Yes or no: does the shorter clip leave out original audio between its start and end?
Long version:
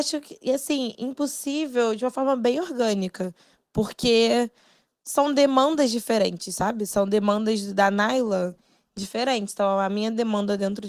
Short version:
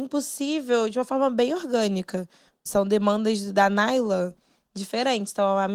yes